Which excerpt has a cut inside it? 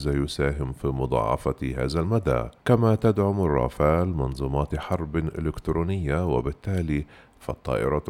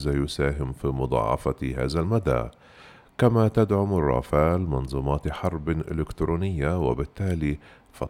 first; 1 cut; at 2.6 s

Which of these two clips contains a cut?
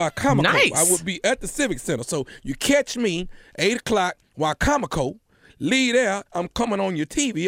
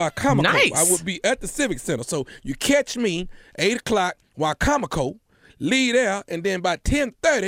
first; 1 cut; at 6.3 s

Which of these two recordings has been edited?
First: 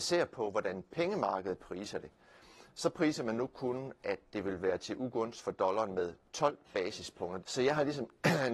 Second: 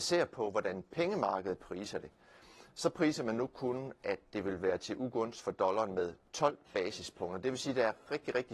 first; 1 cut; at 7.4 s

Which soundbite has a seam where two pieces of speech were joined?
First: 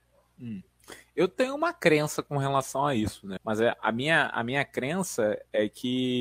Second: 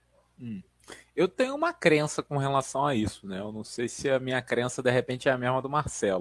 first; 1 cut; at 3.4 s

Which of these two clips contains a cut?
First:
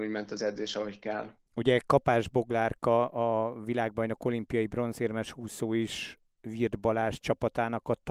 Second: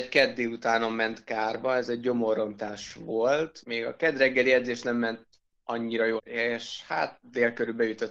second; 2 cuts; at 3.6 s, 6.2 s

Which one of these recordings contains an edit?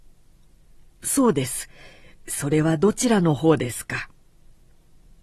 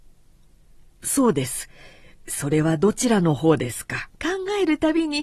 second; 1 cut; at 4.1 s

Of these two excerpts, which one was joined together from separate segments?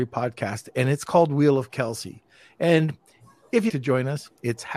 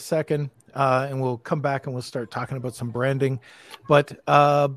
first; 1 cut; at 3.7 s

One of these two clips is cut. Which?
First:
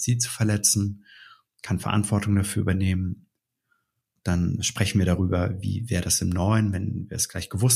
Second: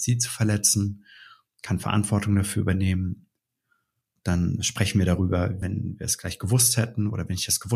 second; 1 cut; at 5.6 s

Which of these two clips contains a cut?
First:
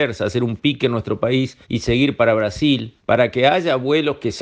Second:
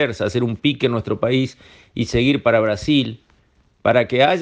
first; 2 cuts; at 1.6 s, 3.0 s

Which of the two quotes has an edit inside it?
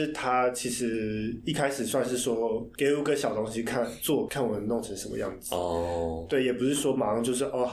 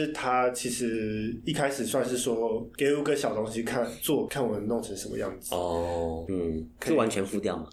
second; 1 cut; at 6.3 s

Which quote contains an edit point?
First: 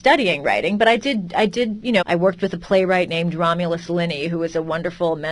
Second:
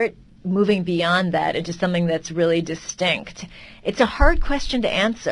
first; 1 cut; at 2.0 s

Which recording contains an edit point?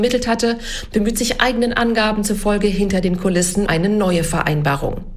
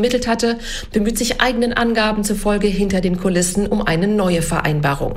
first; 1 cut; at 3.7 s

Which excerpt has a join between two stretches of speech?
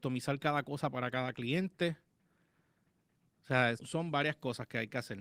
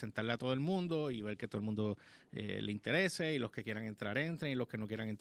first; 1 cut; at 3.8 s

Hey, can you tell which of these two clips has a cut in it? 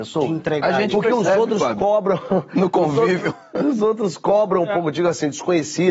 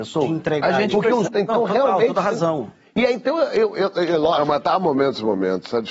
second; 1 cut; at 1.2 s

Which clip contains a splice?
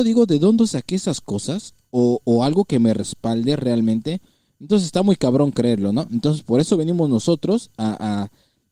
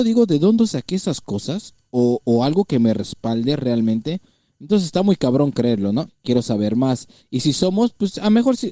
second; 2 cuts; at 6.1 s, 7.2 s

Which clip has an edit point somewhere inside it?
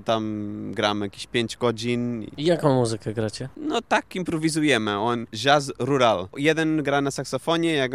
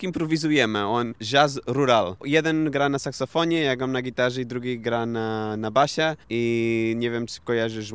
second; 1 cut; at 6.2 s

